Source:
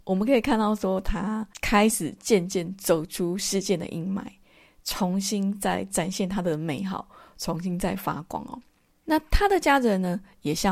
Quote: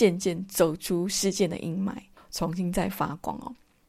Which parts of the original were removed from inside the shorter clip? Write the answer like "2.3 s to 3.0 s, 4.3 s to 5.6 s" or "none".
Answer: 4.5 s to 7.2 s